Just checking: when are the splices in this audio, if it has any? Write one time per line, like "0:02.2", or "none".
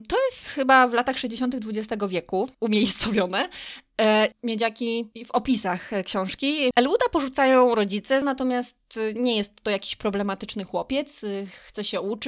0:04.3
0:06.7
0:08.2